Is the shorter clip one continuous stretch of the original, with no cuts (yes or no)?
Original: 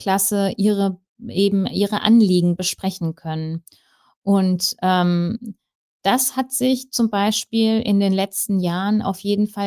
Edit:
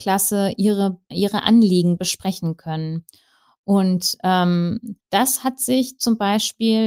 no